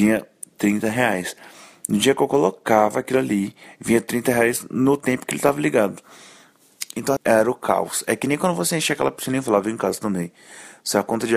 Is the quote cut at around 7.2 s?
yes; 1 cut; at 7.2 s

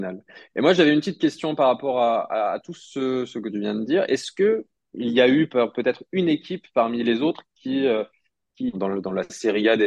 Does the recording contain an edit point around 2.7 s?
no; 1 cut; at 8.7 s

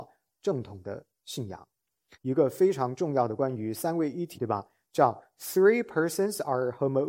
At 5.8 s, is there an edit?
no; 2 cuts; at 2.1 s, 4.3 s

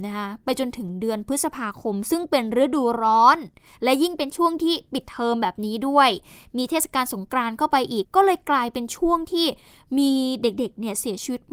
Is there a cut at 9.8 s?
no; 1 cut; at 8.0 s

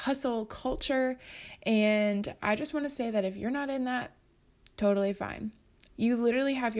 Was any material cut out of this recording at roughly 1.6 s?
no; 1 cut; at 5.9 s

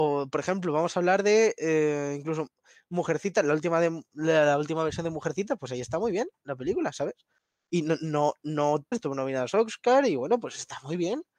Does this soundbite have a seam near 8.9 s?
yes; 1 cut; at 8.9 s

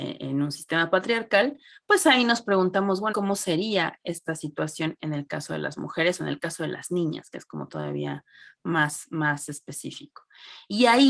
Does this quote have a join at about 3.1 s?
yes; 1 cut; at 3.1 s

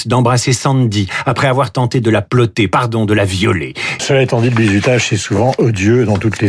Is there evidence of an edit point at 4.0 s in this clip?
yes; 1 cut; at 4.0 s

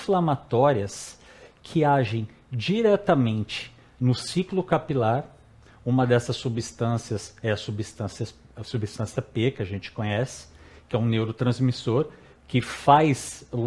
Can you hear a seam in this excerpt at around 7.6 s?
no; 0 cuts

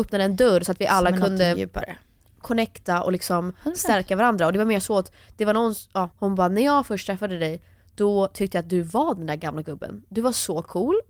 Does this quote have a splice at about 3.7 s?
no; 1 cut; at 6.1 s

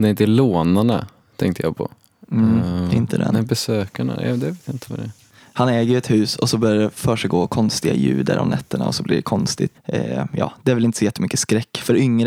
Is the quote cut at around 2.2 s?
yes; 2 cuts; at 2.2 s, 9.7 s

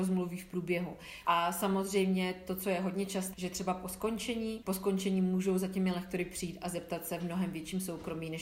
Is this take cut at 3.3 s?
yes; 3 cuts; at 1.2 s, 3.3 s, 4.6 s

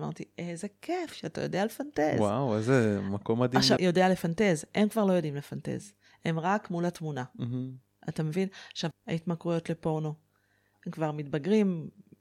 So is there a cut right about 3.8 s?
yes; 3 cuts; at 3.8 s, 8.9 s, 10.7 s

